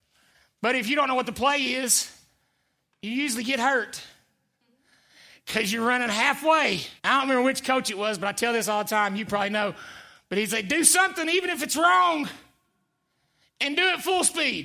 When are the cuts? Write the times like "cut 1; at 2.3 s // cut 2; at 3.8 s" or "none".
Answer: cut 1; at 7.0 s